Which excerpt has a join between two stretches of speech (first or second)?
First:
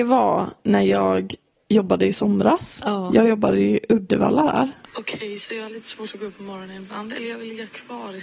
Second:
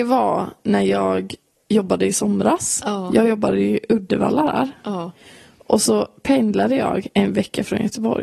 first